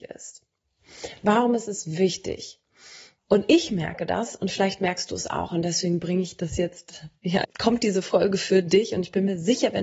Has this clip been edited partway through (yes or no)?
yes